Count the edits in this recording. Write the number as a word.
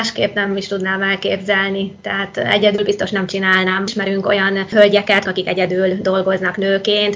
zero